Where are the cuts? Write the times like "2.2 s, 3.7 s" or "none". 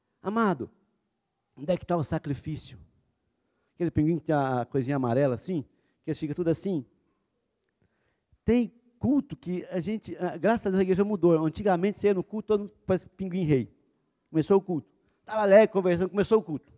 3.7 s